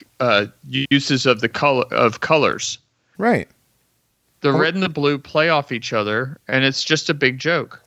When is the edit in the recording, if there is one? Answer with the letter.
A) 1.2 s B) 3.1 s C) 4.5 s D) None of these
B